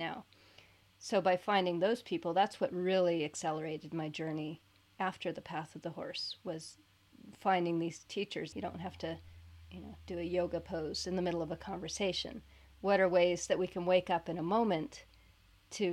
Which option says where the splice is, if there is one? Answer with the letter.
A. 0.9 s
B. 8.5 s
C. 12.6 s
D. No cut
B